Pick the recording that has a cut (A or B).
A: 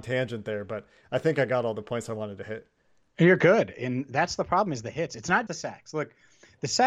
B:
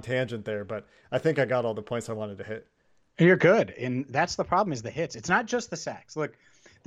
A